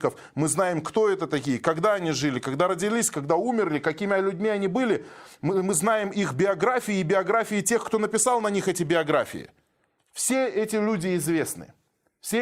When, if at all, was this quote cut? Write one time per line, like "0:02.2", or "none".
none

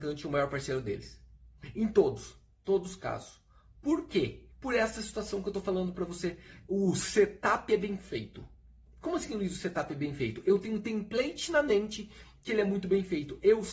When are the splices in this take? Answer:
0:04.5

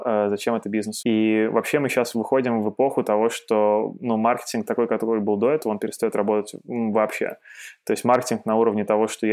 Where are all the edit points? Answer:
0:01.0

